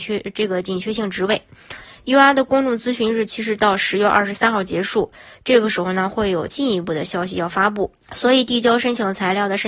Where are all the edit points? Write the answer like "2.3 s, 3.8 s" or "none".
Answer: 8.0 s